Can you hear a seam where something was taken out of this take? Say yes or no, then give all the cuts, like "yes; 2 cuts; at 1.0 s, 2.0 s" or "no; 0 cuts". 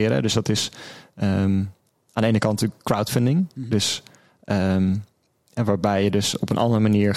no; 0 cuts